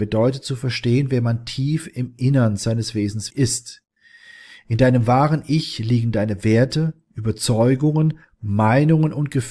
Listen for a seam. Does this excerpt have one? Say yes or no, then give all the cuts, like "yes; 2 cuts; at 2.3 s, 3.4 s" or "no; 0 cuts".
yes; 1 cut; at 3.3 s